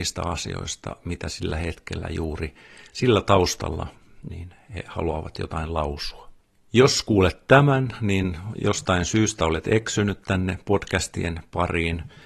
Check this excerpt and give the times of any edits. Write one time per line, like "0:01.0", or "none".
0:04.3